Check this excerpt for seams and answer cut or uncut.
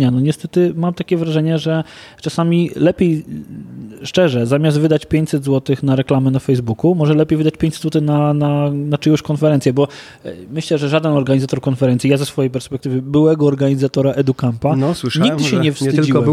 uncut